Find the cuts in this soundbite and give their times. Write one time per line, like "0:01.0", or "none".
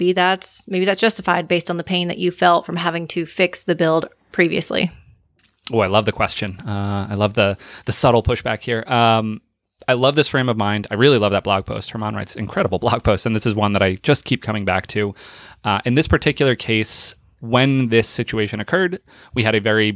none